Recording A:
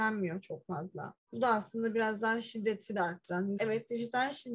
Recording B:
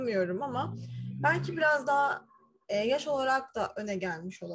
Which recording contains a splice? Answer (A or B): A